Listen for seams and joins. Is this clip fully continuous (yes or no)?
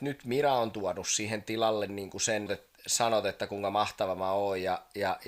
no